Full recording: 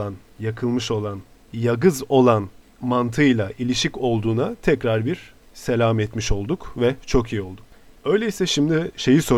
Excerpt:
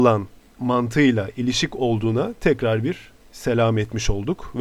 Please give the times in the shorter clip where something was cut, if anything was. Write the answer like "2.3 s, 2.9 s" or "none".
none